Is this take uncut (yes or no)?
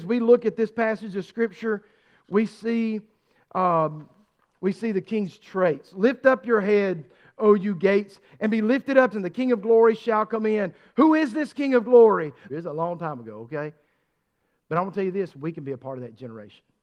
no